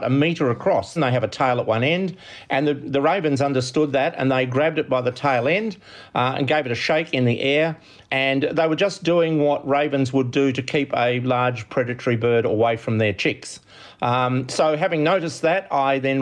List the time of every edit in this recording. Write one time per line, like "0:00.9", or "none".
0:01.0